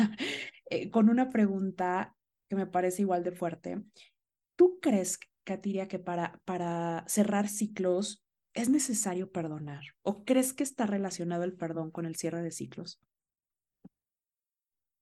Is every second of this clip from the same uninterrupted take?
yes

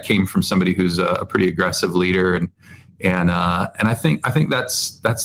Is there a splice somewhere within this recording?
no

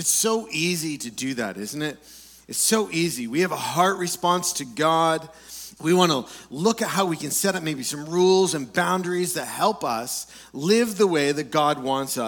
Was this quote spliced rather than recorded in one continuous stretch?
yes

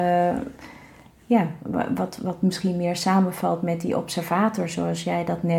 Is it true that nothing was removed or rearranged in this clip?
yes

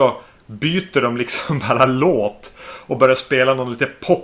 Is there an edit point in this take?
no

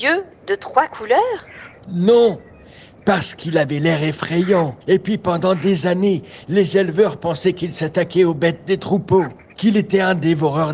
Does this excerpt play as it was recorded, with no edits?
no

